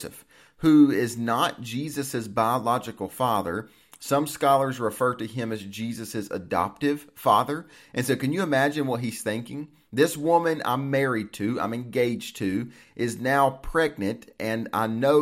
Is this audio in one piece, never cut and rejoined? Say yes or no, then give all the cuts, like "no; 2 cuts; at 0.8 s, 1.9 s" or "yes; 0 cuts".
yes; 0 cuts